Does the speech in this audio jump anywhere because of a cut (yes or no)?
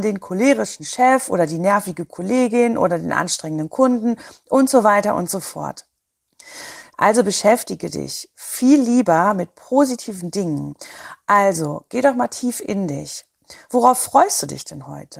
yes